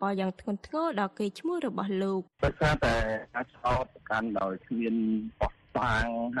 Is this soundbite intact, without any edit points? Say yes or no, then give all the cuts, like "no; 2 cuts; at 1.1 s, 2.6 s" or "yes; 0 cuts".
no; 1 cut; at 2.3 s